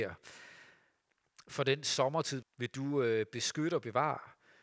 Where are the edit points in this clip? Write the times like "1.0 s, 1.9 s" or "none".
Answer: 2.4 s